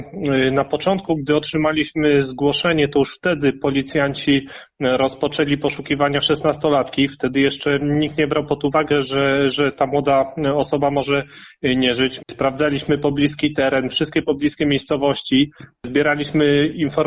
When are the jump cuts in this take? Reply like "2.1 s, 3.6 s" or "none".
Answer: 12.2 s